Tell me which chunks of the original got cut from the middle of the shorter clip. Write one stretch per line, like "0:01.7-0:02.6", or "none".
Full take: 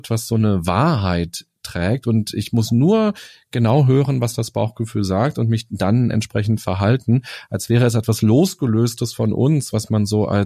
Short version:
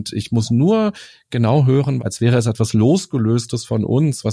0:04.2-0:07.5